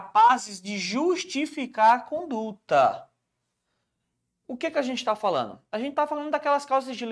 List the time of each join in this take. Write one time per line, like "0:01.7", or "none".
none